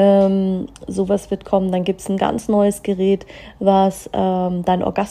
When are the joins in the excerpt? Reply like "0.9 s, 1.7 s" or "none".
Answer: none